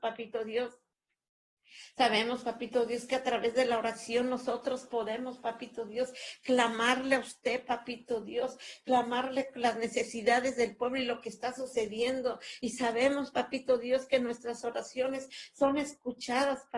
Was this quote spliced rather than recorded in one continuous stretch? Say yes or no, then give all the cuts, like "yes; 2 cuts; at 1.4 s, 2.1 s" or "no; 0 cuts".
no; 0 cuts